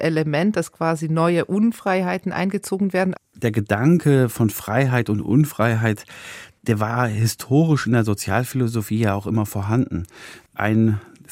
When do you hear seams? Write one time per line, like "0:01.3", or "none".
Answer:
0:03.1